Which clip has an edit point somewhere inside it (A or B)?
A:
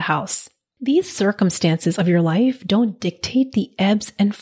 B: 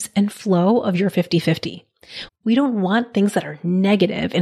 B